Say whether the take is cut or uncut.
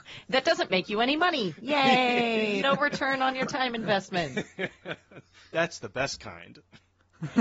cut